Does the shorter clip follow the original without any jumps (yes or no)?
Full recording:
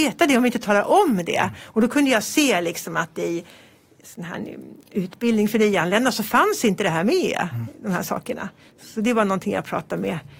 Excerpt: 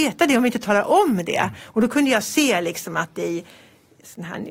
yes